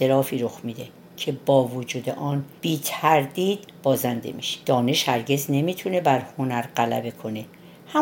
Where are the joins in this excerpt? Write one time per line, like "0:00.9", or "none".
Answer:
0:02.6
0:04.6